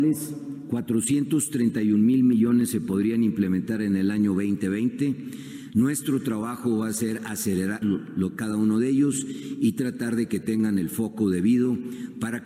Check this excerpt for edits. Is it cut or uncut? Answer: cut